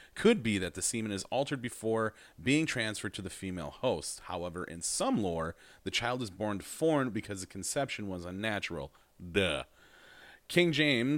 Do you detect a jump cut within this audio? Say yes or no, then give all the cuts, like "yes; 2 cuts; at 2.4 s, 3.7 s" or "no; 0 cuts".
no; 0 cuts